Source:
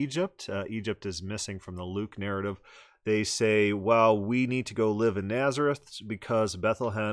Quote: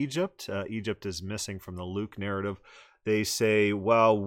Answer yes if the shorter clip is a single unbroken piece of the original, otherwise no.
yes